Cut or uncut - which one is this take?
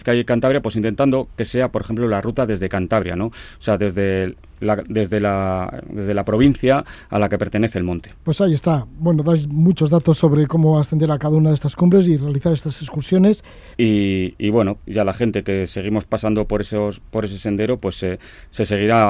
cut